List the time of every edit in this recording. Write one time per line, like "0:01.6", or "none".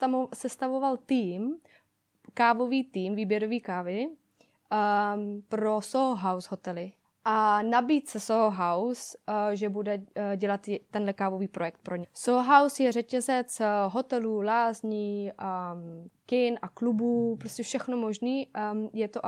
0:07.0
0:12.0